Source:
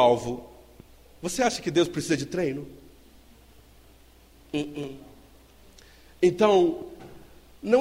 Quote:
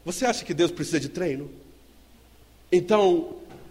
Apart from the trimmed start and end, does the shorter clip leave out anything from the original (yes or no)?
yes